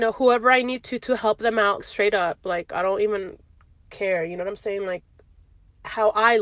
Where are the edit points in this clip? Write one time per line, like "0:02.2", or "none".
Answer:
0:01.8